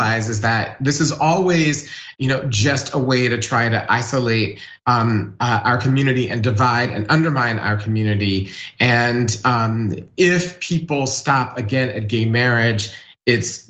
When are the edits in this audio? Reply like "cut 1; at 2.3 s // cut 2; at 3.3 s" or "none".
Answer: none